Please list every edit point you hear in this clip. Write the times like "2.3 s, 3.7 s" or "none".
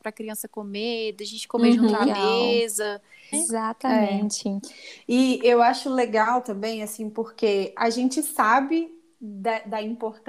3.3 s